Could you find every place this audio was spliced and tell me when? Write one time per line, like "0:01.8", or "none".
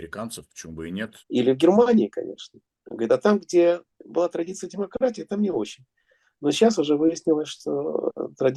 0:01.2

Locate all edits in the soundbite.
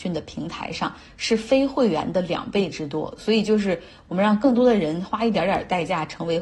none

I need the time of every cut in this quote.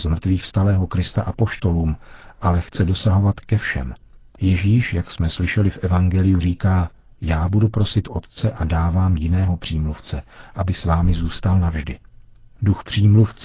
none

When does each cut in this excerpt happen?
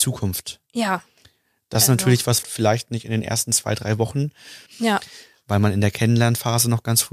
0:02.4
0:04.7

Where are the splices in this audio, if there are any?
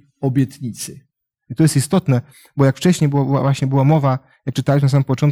0:01.3

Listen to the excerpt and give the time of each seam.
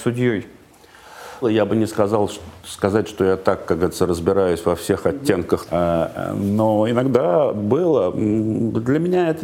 0:01.4
0:05.7

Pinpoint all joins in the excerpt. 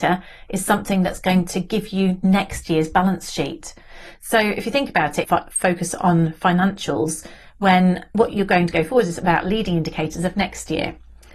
0:05.2

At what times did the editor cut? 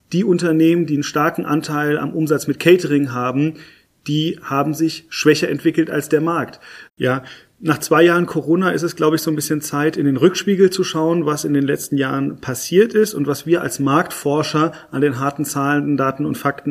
0:06.9

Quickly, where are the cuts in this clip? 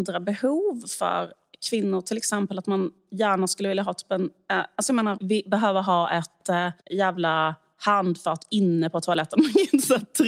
0:05.2
0:06.8

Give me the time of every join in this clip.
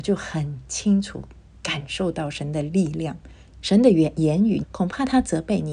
0:03.6
0:04.6

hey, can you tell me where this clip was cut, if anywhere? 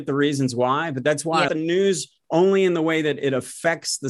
0:01.5

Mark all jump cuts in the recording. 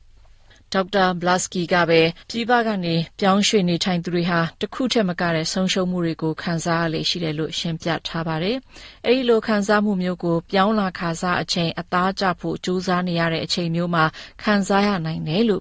0:02.2

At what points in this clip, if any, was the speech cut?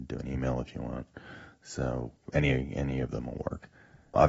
none

